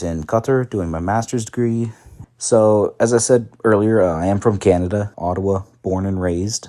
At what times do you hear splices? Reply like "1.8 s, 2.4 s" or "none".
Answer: 2.2 s, 5.1 s